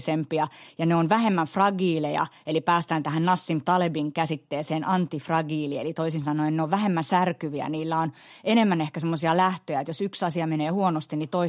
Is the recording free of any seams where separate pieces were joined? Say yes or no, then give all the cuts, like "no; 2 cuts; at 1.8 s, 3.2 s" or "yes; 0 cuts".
yes; 0 cuts